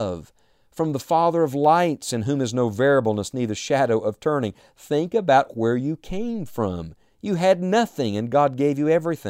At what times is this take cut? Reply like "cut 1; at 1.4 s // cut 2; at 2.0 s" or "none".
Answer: none